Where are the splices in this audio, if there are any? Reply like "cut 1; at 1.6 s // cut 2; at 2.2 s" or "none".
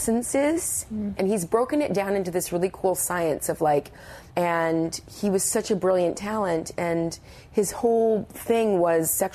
cut 1; at 1.1 s // cut 2; at 4.3 s